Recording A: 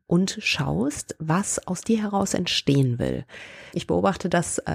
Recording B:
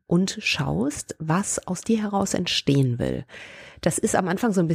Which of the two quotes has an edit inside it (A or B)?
A